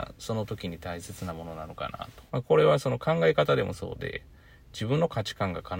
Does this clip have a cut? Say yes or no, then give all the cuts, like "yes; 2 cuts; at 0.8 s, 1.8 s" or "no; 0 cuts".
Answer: yes; 1 cut; at 2.3 s